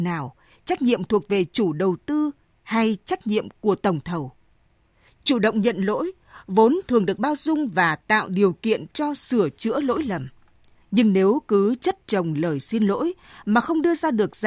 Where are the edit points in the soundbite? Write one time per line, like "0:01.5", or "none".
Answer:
0:05.1